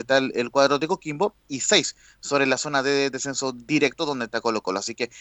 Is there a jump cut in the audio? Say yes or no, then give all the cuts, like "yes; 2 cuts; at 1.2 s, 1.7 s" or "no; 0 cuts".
no; 0 cuts